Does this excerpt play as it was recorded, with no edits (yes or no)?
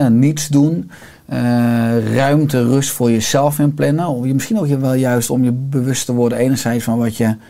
yes